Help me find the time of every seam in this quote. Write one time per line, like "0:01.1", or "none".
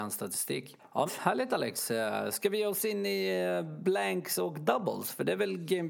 0:01.1